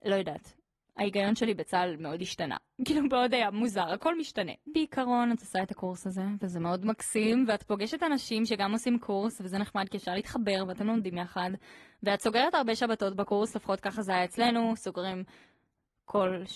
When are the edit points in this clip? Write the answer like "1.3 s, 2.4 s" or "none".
none